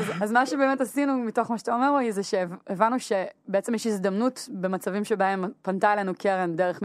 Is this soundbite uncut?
yes; 0 cuts

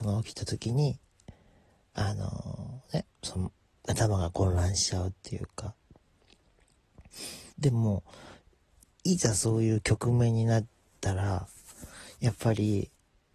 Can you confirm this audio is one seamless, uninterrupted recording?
no; 2 cuts; at 3.8 s, 7.5 s

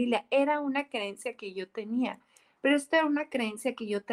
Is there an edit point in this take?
no; 0 cuts

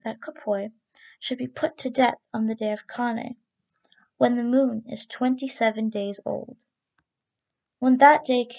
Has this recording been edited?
no; 0 cuts

